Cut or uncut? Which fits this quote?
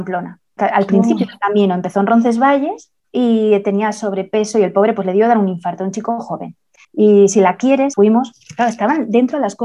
cut